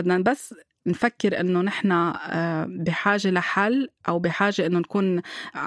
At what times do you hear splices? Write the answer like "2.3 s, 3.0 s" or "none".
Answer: 4.0 s